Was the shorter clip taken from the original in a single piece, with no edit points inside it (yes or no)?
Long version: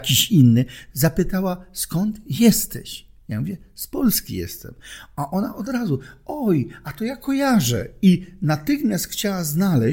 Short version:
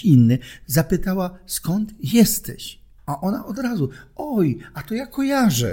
no